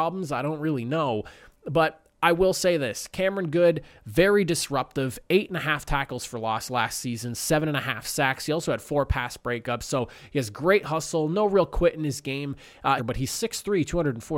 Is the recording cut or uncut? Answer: cut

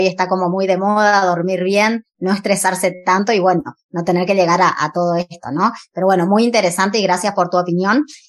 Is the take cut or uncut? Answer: uncut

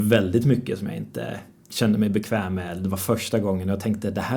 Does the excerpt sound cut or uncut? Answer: uncut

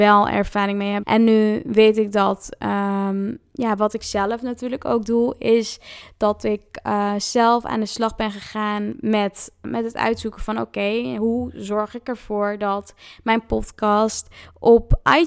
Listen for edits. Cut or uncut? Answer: cut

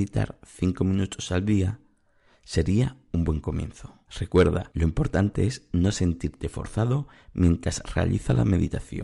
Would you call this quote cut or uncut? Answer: cut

